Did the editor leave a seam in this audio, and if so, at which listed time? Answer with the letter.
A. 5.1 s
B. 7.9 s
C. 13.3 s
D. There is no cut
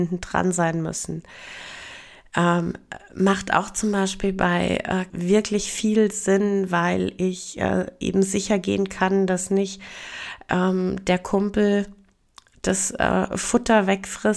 A